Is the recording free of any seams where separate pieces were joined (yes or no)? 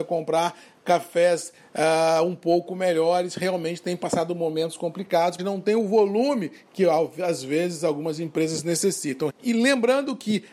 no